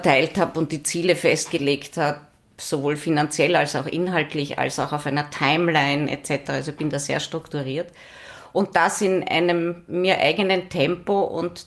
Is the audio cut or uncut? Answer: uncut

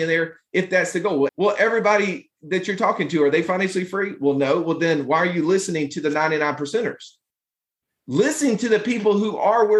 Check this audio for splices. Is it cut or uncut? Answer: cut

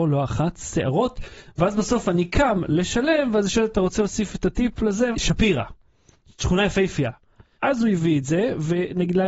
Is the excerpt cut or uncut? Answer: cut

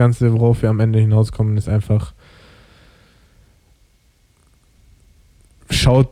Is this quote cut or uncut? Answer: uncut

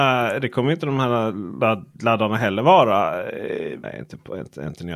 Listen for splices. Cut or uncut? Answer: cut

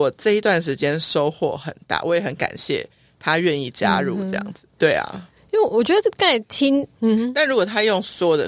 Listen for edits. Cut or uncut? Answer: cut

